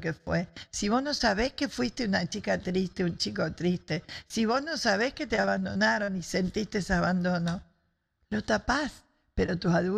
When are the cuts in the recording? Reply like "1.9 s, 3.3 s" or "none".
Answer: none

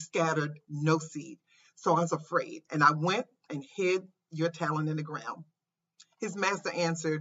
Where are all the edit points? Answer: none

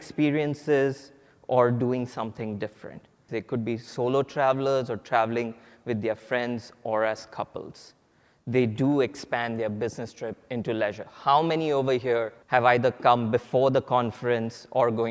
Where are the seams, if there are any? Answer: 3.3 s, 12.4 s

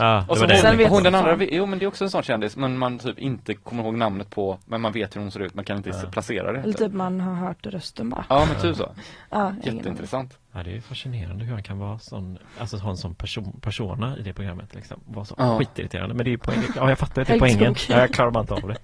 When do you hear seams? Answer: 14.2 s

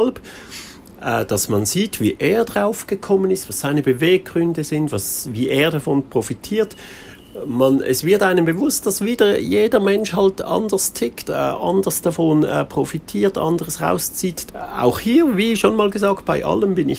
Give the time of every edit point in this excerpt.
11.2 s, 14.5 s

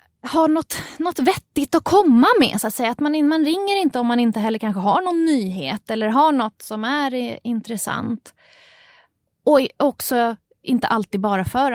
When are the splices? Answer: none

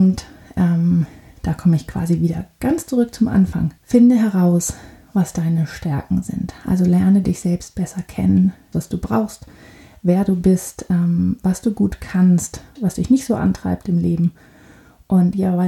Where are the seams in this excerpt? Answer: 3.8 s, 8.7 s, 12.8 s

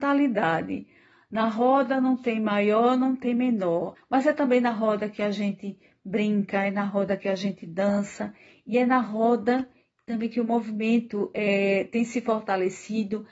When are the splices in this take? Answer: 4.0 s

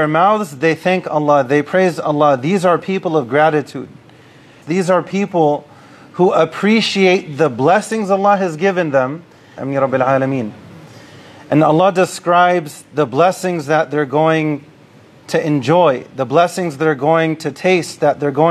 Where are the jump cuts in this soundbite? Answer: 4.6 s, 9.6 s

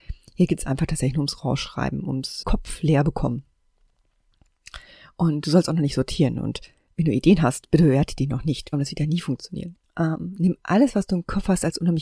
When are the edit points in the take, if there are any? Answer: 2.4 s, 8.7 s, 9.8 s

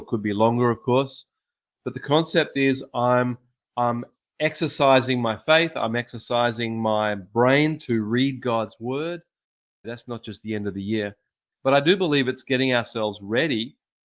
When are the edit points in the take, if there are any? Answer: 9.8 s

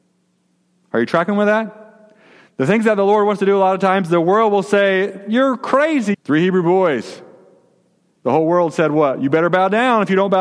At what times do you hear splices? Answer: 6.1 s

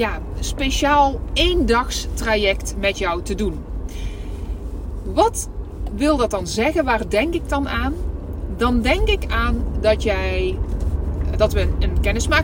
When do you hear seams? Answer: 11.3 s

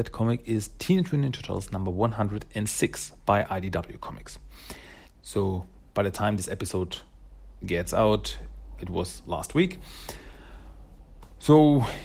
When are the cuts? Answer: 5.0 s, 8.8 s

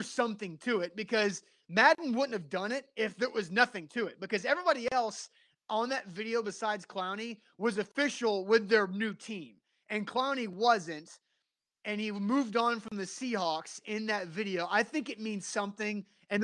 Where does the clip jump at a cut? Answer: none

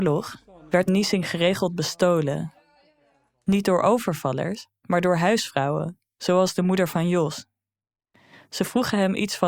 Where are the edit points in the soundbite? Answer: none

